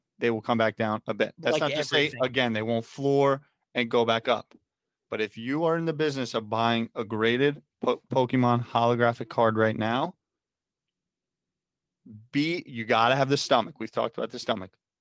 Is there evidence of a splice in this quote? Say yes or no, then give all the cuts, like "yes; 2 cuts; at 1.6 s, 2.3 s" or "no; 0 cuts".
no; 0 cuts